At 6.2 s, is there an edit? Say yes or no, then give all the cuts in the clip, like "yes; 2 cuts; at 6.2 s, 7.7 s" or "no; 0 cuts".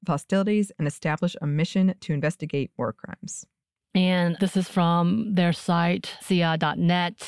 no; 1 cut; at 4.4 s